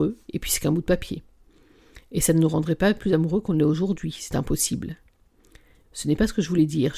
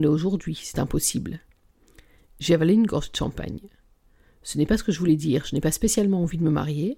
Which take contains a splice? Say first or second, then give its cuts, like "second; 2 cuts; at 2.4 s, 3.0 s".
first; 1 cut; at 5.8 s